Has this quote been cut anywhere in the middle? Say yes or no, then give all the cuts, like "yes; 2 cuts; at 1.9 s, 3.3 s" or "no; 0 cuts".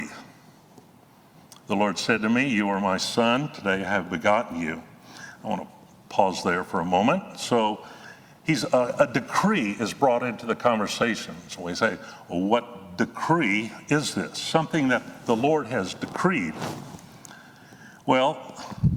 no; 0 cuts